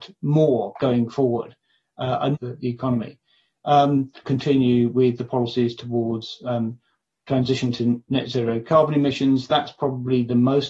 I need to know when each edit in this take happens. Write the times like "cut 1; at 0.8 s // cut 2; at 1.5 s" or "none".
cut 1; at 2.3 s // cut 2; at 4.2 s